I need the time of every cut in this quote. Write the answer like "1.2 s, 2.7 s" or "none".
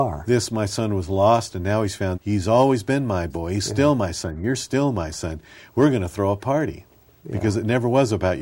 2.1 s